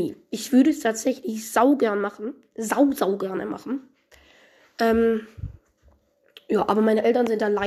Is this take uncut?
yes; 0 cuts

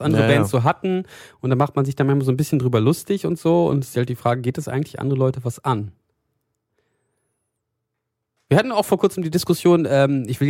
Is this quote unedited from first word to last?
yes; 0 cuts

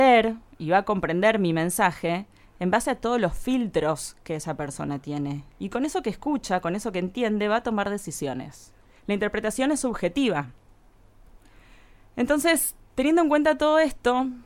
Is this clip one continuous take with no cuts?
no; 1 cut; at 9.0 s

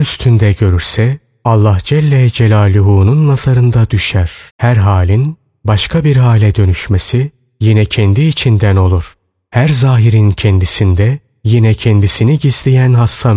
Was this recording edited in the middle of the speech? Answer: yes; 1 cut; at 4.5 s

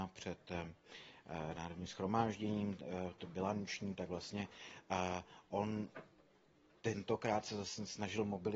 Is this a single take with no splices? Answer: yes; 0 cuts

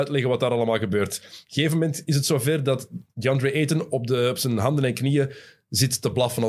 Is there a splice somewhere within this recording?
yes; 1 cut; at 3.1 s

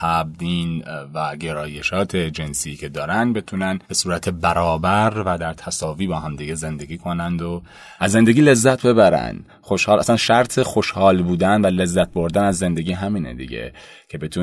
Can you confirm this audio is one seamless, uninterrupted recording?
no; 1 cut; at 3.8 s

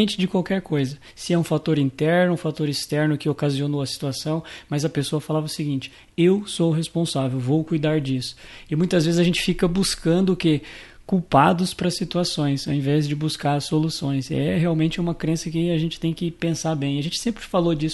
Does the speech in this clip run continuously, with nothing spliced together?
yes; 0 cuts

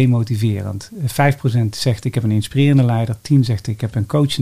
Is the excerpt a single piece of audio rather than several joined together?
yes; 0 cuts

